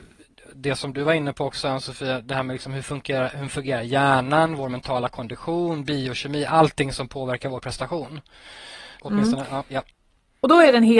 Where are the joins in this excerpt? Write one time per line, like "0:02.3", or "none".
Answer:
0:09.0